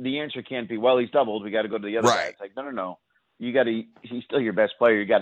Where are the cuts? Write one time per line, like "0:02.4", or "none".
none